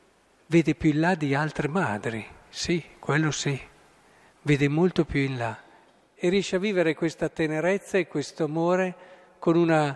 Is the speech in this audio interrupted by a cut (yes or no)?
no